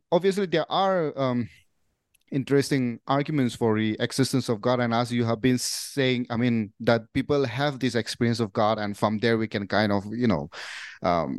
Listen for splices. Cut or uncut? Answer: uncut